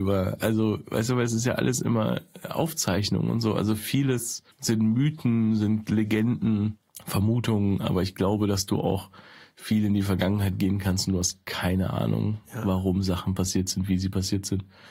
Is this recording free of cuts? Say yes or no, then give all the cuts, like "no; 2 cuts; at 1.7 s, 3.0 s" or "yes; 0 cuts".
no; 1 cut; at 4.5 s